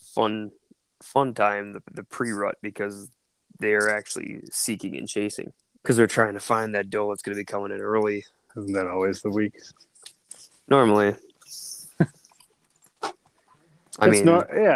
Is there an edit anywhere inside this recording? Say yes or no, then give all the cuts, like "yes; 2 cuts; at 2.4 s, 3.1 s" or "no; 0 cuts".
yes; 2 cuts; at 5.8 s, 8.5 s